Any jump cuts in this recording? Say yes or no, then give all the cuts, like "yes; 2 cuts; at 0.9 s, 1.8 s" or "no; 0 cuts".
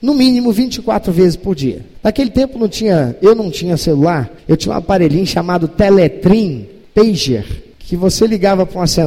no; 0 cuts